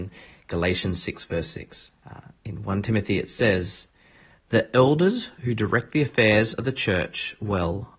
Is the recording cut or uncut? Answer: cut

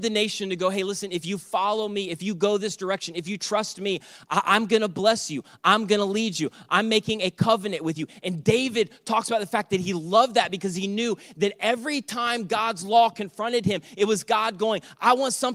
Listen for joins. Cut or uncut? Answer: uncut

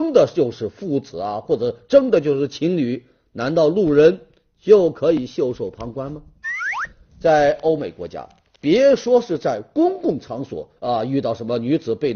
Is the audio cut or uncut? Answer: uncut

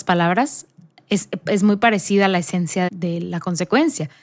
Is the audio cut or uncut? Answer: cut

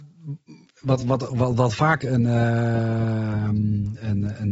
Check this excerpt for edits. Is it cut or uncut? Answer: cut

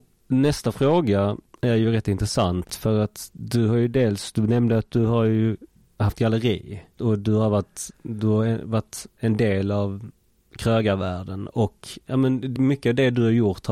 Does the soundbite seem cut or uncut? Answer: cut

